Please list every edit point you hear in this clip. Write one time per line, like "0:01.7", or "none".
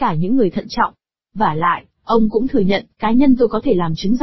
none